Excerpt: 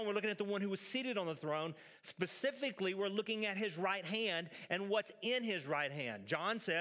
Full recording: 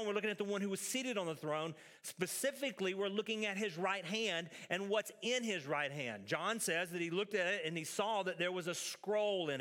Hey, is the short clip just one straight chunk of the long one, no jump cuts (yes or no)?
yes